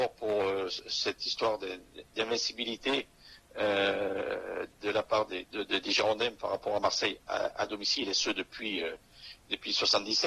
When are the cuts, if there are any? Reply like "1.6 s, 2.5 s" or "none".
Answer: 5.4 s